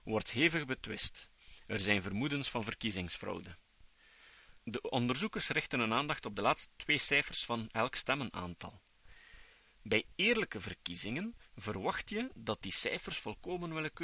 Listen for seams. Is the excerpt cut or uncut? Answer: uncut